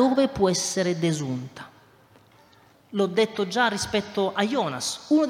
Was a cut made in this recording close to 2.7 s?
yes; 1 cut; at 2.7 s

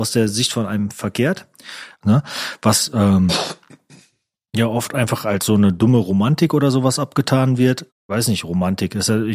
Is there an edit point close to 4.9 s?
no; 2 cuts; at 2.0 s, 7.9 s

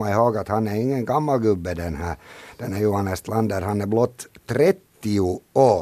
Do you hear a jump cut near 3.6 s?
no; 0 cuts

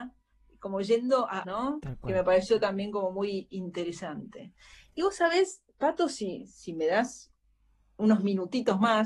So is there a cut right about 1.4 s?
yes; 1 cut; at 1.4 s

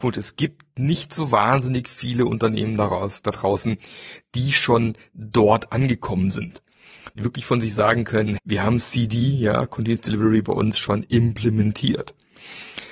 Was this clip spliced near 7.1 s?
no; 1 cut; at 8.4 s

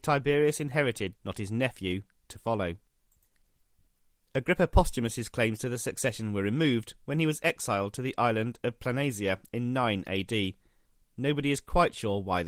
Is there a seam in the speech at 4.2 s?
no; 1 cut; at 1.2 s

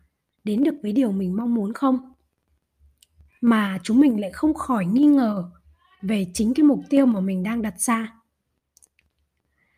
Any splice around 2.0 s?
no; 1 cut; at 3.3 s

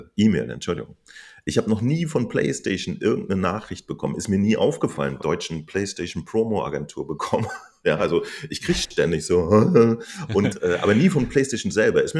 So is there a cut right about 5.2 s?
yes; 1 cut; at 5.2 s

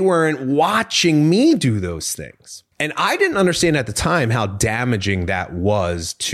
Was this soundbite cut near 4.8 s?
no; 1 cut; at 2.7 s

